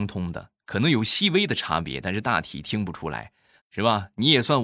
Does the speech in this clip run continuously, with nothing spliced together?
no; 1 cut; at 3.6 s

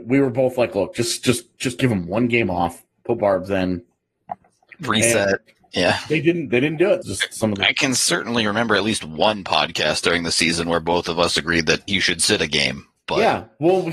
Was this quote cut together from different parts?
yes; 2 cuts; at 7.0 s, 11.9 s

